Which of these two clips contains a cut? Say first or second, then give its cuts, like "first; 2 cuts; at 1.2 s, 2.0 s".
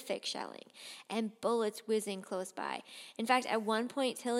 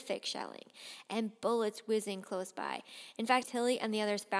second; 1 cut; at 3.4 s